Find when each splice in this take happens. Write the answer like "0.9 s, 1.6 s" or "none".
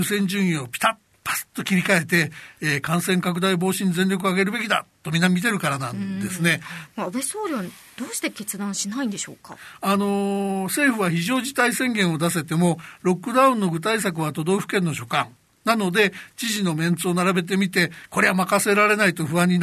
6.9 s